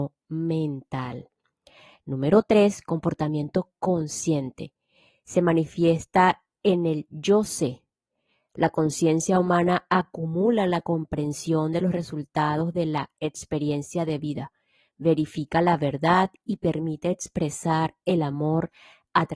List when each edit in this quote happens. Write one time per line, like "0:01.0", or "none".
none